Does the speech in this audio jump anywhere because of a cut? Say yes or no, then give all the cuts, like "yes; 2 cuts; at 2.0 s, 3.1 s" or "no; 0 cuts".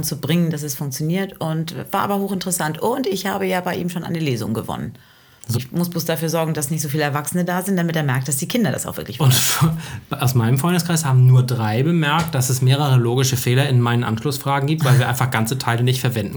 yes; 1 cut; at 5.5 s